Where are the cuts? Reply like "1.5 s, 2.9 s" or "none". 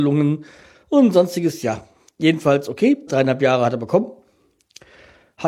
3.1 s